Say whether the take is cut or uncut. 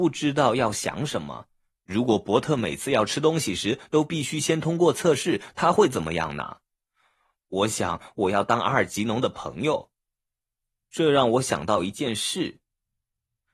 cut